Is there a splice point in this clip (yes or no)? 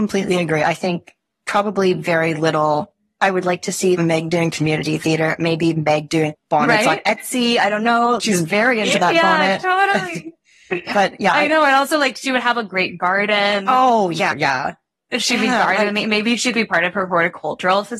no